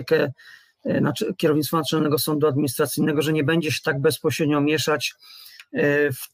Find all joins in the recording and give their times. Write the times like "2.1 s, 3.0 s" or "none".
none